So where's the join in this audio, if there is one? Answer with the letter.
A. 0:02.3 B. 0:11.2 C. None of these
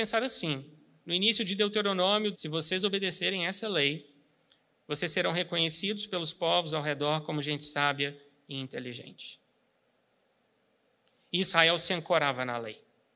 A